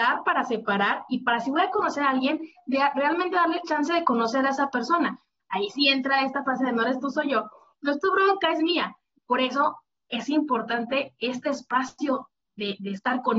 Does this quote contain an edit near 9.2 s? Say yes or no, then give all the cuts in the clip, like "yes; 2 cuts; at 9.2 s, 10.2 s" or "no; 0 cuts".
yes; 2 cuts; at 5.4 s, 9.2 s